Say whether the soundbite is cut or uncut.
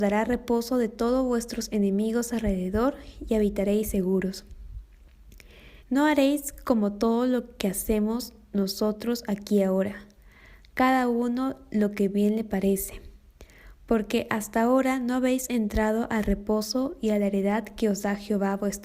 cut